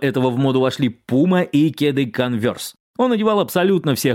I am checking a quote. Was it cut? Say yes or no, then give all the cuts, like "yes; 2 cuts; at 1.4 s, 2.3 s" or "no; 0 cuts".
yes; 1 cut; at 2.9 s